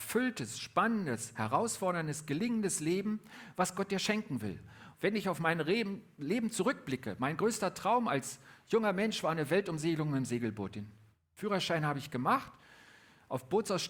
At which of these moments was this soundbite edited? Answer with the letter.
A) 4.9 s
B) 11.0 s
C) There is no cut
A